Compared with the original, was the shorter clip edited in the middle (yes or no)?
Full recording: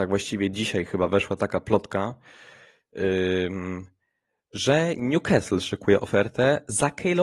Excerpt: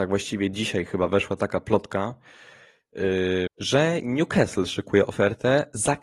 yes